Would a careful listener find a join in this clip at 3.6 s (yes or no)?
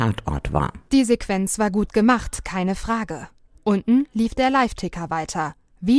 yes